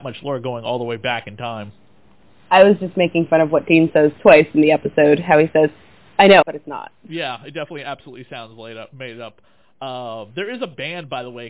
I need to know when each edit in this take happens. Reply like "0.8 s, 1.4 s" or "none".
6.4 s